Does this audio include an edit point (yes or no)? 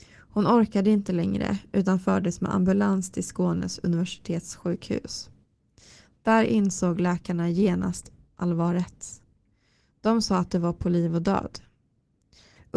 no